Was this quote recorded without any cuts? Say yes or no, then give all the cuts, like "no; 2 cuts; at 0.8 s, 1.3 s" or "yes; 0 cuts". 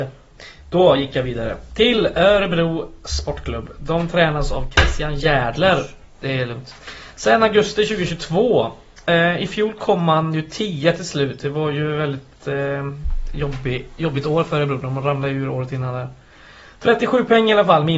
yes; 0 cuts